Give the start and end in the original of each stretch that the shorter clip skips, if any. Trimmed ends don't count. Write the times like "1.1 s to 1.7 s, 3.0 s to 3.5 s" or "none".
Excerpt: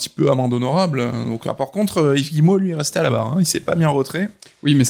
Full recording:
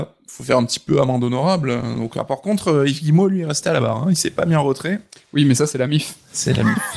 none